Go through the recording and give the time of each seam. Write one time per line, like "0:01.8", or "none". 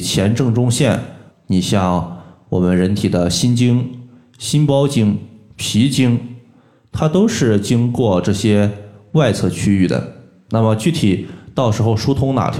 0:01.3